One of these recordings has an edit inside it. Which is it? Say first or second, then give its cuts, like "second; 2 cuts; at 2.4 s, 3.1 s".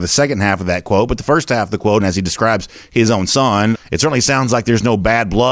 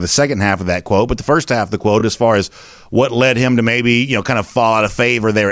first; 2 cuts; at 2.0 s, 3.7 s